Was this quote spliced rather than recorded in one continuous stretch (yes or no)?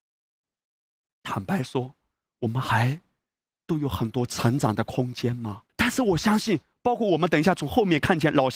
yes